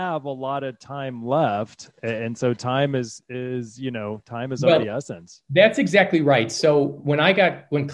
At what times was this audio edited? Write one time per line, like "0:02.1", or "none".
none